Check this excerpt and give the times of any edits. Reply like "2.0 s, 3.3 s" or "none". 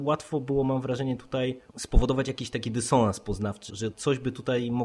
1.7 s, 3.7 s